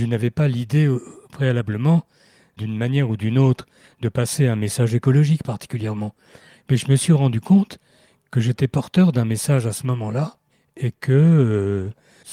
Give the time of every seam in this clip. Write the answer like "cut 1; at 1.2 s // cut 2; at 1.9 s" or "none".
none